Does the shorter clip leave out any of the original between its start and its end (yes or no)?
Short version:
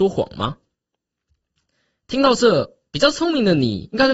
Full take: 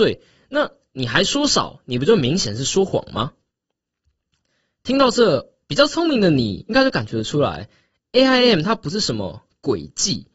no